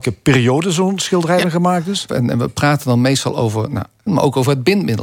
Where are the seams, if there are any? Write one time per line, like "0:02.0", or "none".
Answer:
0:02.1
0:04.1